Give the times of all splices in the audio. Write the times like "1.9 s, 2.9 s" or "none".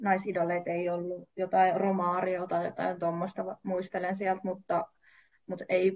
none

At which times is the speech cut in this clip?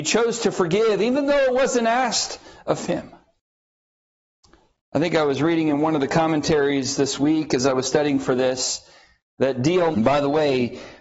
9.9 s

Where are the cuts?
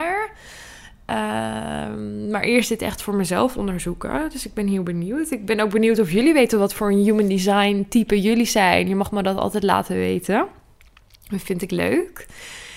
none

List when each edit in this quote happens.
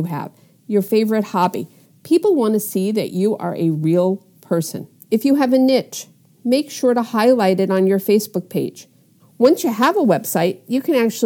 5.0 s, 9.2 s

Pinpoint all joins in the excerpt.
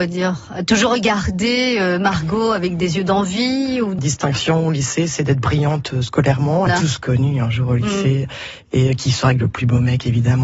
4.0 s, 6.7 s

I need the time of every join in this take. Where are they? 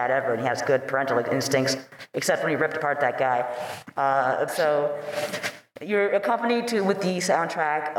4.5 s

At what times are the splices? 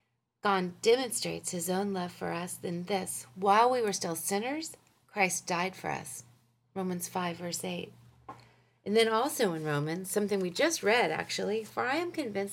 none

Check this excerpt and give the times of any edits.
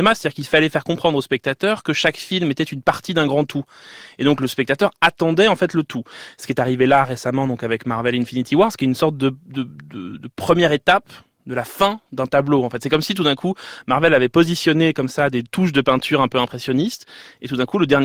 none

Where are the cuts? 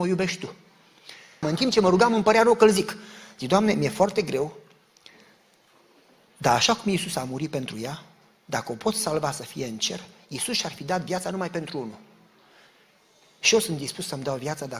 1.4 s

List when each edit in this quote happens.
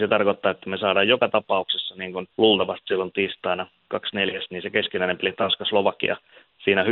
2.3 s

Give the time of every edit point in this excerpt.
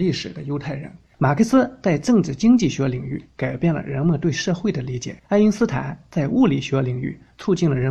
1.1 s, 5.2 s

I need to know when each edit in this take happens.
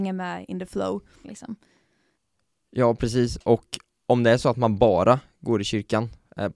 1.2 s

